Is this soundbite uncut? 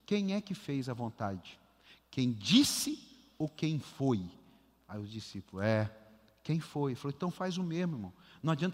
yes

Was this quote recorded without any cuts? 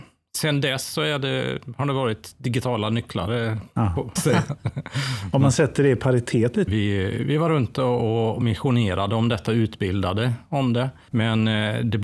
no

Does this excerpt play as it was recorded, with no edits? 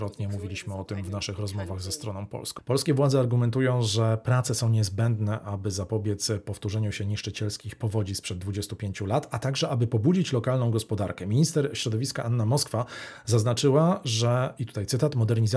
no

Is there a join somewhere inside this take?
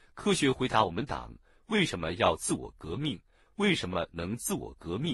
no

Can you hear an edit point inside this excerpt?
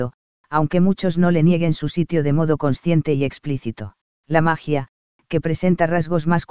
yes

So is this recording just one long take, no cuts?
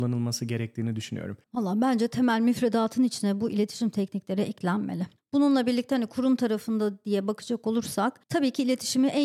no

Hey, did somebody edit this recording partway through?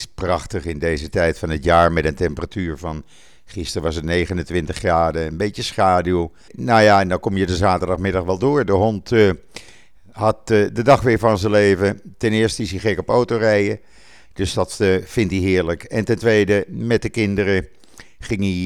yes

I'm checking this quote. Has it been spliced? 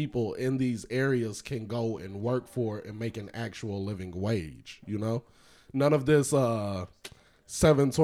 no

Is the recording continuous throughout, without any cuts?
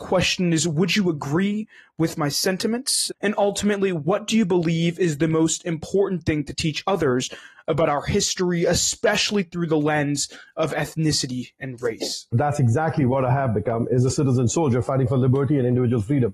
no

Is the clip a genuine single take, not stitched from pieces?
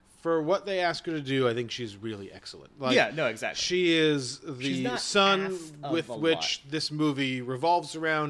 yes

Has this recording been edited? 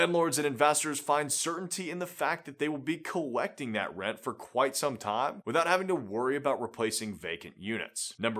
no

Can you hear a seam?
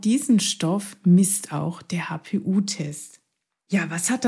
no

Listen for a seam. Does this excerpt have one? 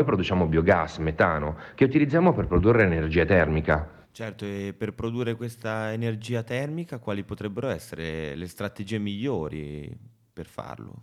yes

